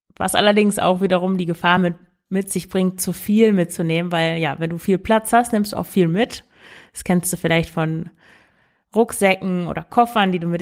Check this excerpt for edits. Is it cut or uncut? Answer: uncut